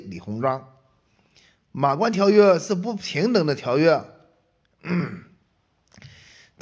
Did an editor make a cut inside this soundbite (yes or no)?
no